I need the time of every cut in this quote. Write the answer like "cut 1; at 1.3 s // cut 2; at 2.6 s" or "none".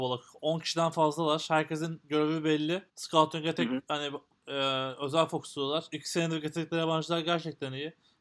cut 1; at 2.9 s